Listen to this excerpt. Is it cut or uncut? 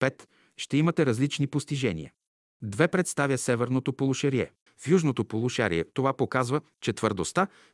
cut